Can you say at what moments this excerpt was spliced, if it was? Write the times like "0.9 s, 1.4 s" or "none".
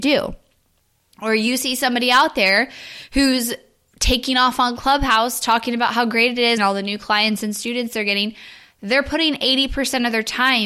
6.6 s